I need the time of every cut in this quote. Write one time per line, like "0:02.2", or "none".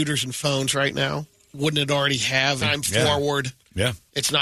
0:01.3
0:02.6